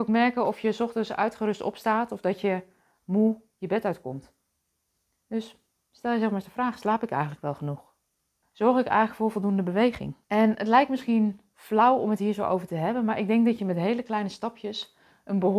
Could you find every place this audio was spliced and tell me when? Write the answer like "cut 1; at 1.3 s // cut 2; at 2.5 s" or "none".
cut 1; at 8.4 s // cut 2; at 10.2 s